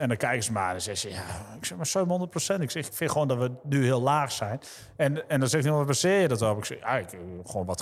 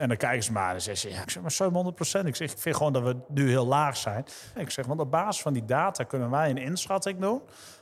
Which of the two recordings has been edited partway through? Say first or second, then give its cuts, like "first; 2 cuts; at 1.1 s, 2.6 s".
second; 2 cuts; at 1.2 s, 4.6 s